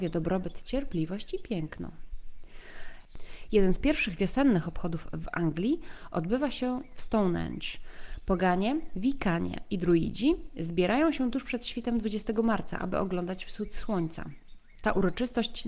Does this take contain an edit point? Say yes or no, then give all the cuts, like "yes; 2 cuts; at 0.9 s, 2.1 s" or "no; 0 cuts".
no; 0 cuts